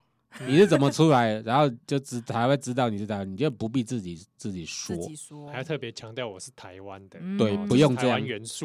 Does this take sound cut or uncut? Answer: uncut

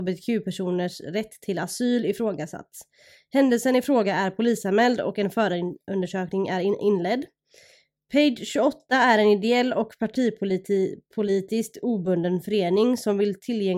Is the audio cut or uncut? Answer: uncut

